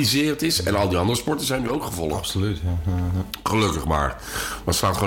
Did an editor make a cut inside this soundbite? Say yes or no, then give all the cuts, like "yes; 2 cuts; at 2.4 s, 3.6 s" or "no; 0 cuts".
no; 0 cuts